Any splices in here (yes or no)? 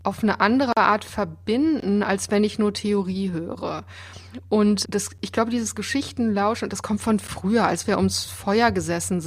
yes